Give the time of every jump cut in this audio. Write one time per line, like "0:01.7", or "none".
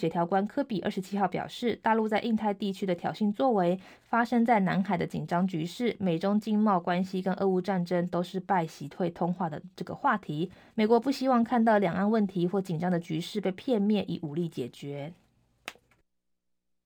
0:10.7